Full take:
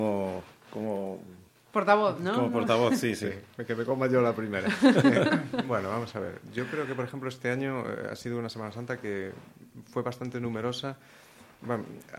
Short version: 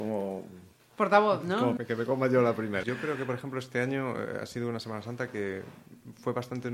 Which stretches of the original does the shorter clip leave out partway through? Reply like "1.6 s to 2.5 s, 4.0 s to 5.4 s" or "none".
2.5 s to 3.6 s, 4.6 s to 6.5 s